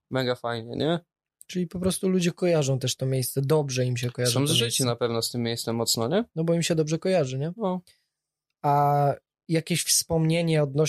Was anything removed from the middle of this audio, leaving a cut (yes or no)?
no